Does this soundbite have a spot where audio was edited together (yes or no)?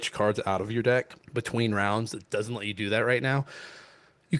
yes